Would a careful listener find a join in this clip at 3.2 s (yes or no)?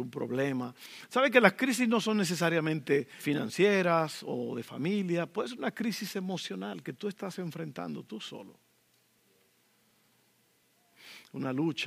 yes